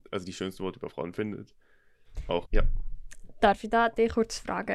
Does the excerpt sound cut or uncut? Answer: cut